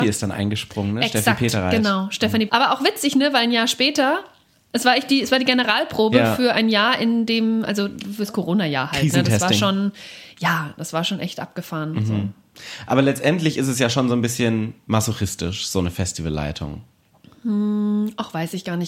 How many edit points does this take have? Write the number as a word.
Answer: one